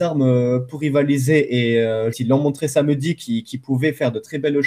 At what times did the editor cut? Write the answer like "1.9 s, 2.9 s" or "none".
2.1 s